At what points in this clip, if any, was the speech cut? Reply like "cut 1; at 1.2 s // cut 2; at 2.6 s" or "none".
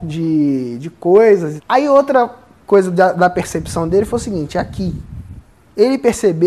cut 1; at 1.6 s